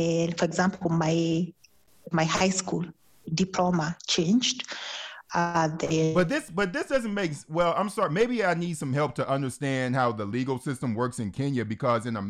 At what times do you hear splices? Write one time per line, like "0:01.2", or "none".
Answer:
0:02.1